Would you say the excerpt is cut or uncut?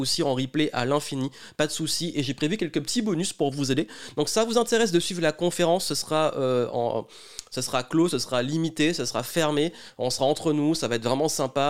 uncut